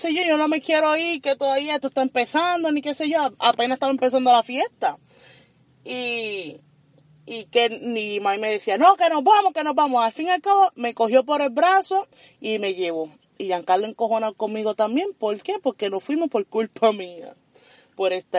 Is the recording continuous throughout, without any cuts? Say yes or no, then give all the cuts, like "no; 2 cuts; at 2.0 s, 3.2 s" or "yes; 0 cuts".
yes; 0 cuts